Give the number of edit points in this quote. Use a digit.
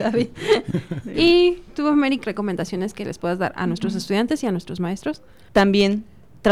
2